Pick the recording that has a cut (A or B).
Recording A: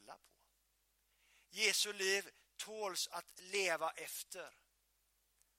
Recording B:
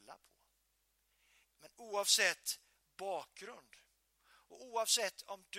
B